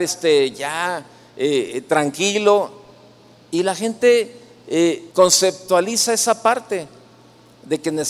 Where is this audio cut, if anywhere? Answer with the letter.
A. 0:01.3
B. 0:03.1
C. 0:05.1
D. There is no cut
C